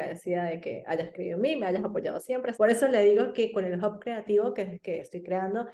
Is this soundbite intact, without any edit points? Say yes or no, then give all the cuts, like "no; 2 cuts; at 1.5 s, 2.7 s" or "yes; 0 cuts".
no; 1 cut; at 2.5 s